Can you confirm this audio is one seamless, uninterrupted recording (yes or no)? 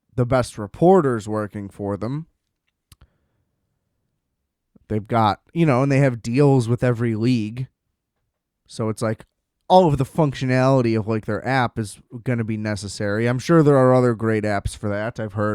yes